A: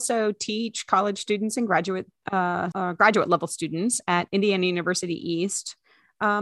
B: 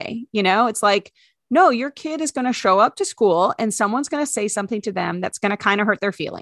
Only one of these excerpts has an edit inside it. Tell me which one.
A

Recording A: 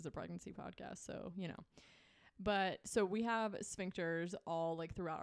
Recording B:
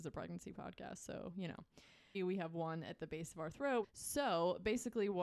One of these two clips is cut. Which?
B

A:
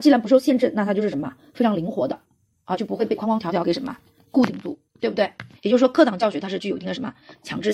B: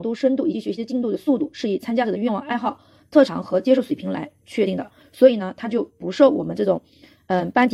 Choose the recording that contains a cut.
A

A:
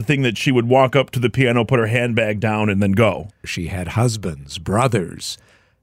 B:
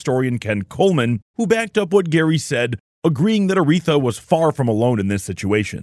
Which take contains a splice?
A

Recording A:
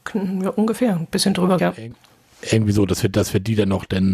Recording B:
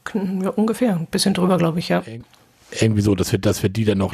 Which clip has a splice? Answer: A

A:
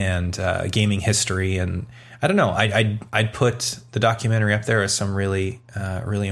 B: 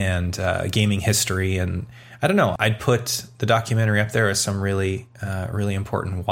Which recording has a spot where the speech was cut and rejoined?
B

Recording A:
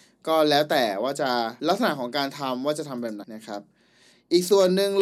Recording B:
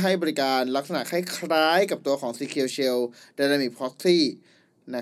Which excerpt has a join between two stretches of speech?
A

